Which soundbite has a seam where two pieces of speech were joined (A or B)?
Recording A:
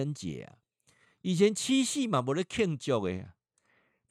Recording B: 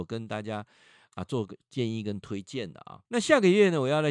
B